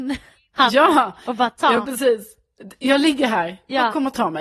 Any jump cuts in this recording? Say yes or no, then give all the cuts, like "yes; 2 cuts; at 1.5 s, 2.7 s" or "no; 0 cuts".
no; 0 cuts